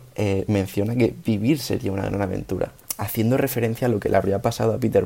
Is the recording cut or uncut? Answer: uncut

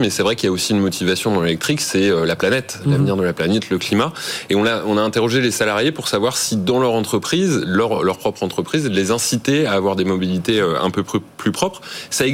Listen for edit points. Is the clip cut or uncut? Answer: uncut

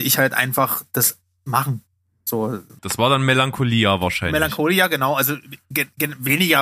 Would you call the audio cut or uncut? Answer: cut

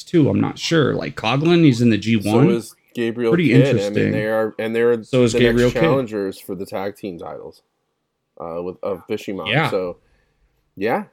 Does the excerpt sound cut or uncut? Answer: uncut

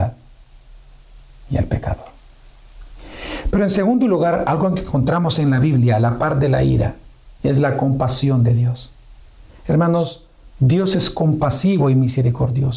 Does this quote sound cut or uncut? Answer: uncut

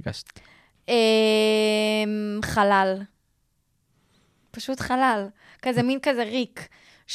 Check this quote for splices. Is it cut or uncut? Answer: uncut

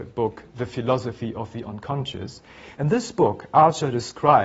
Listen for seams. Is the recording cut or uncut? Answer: cut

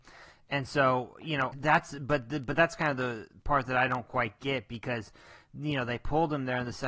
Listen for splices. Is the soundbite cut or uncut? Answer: cut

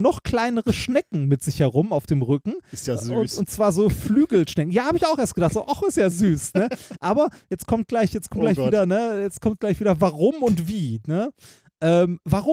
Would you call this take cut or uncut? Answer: uncut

